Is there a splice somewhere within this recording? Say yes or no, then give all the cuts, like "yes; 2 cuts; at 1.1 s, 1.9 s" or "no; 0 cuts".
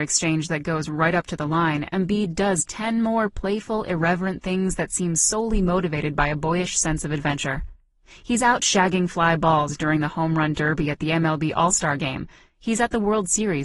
no; 0 cuts